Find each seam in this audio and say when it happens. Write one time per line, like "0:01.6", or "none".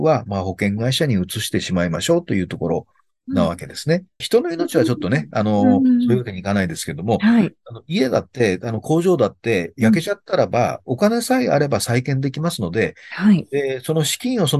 0:04.2